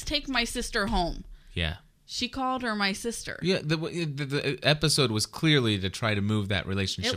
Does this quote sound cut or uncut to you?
uncut